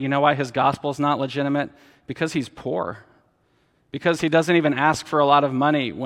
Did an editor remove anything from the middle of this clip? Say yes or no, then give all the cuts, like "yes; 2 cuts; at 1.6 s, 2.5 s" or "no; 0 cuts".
no; 0 cuts